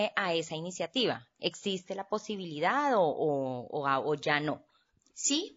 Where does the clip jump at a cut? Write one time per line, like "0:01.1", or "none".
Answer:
none